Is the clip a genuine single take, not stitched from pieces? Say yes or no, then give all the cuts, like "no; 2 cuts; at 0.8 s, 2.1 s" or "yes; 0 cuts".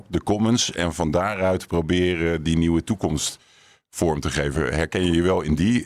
yes; 0 cuts